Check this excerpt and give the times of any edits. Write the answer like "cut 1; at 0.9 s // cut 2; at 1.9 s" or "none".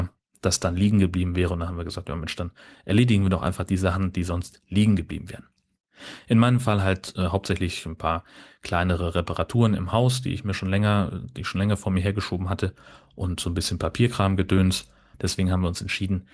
cut 1; at 15.1 s

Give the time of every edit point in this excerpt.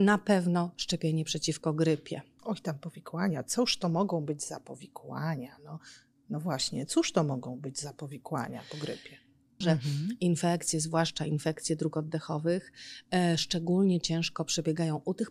cut 1; at 2.4 s // cut 2; at 9.6 s

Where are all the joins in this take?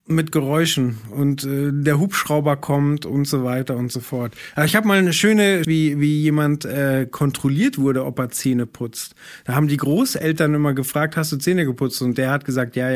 cut 1; at 5.6 s

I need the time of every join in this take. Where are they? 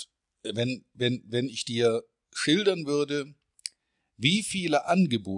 none

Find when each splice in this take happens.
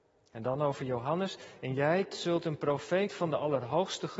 cut 1; at 2.1 s

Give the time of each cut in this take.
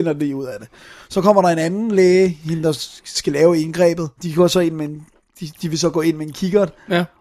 cut 1; at 4.2 s

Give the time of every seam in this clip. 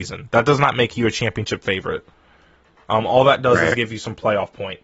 none

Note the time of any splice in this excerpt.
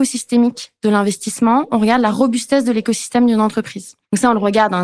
none

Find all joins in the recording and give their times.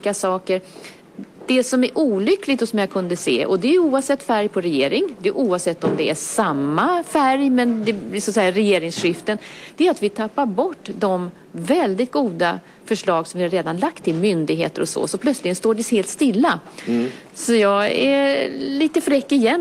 none

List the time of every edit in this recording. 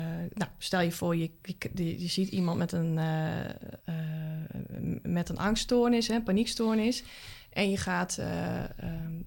cut 1; at 3.8 s

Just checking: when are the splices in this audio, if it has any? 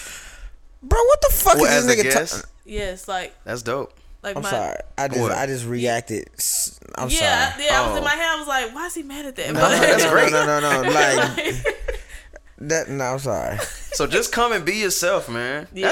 none

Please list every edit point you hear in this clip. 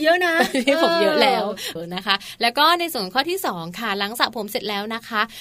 cut 1; at 1.8 s

